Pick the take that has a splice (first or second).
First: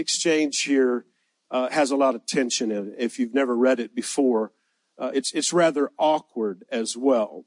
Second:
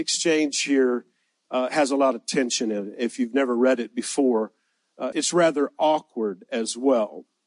second